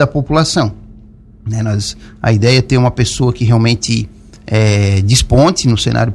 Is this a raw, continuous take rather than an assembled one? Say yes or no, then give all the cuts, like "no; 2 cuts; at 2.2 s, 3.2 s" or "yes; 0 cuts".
yes; 0 cuts